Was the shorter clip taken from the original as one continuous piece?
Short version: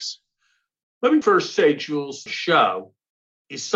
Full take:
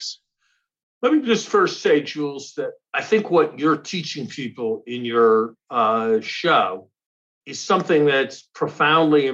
no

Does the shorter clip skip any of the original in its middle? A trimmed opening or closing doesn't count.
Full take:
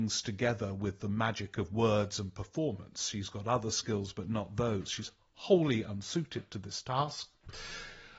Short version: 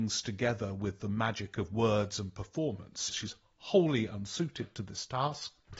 yes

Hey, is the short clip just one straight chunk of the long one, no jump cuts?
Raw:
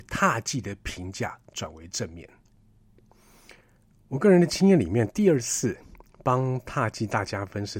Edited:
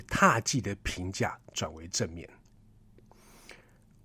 yes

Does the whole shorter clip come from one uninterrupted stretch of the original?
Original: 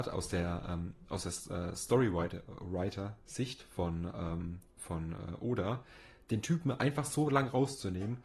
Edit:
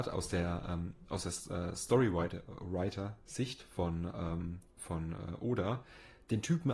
yes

